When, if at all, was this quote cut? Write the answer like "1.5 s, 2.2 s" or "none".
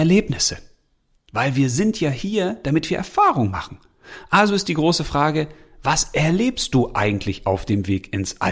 none